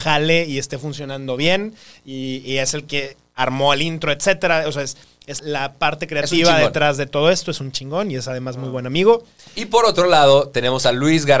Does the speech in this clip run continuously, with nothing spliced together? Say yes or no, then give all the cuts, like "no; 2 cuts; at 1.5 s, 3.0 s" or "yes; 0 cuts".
no; 1 cut; at 5.4 s